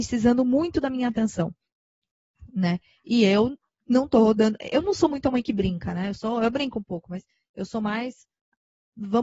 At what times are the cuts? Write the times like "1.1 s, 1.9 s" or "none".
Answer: none